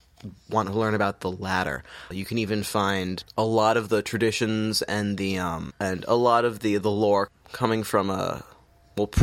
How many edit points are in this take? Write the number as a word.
two